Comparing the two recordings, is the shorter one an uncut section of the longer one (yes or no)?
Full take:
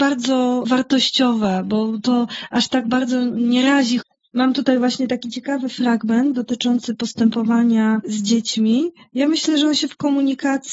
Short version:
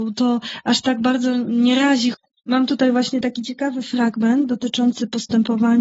yes